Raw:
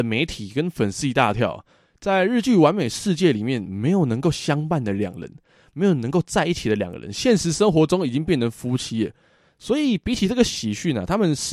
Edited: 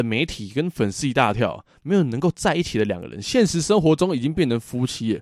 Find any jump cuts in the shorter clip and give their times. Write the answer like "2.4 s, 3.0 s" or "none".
1.7 s